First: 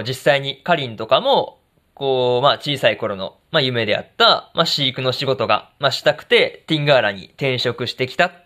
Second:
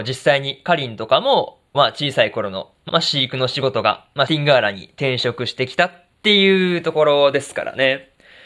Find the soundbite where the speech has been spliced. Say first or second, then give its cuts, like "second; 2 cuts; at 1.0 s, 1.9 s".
second; 3 cuts; at 1.7 s, 2.9 s, 4.3 s